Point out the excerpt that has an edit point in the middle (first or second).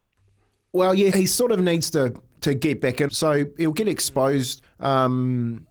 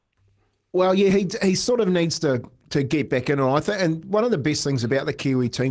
first